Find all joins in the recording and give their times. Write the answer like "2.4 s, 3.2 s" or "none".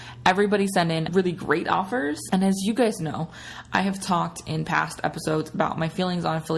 1.1 s, 2.3 s